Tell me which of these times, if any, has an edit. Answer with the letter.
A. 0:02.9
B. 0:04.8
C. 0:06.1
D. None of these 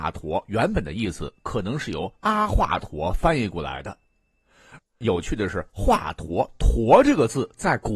B